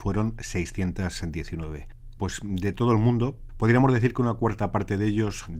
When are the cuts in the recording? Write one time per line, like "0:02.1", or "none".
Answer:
0:02.2
0:03.5